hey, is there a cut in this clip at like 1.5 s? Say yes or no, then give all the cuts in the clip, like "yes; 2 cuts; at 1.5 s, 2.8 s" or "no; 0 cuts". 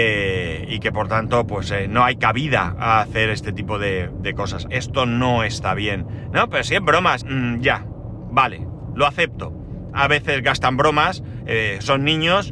no; 3 cuts; at 4.7 s, 7.2 s, 9.9 s